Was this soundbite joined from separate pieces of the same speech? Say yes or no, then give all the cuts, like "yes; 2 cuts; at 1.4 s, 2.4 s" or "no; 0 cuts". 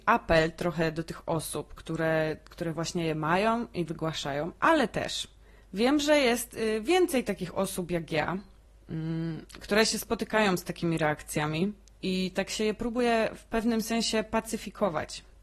no; 0 cuts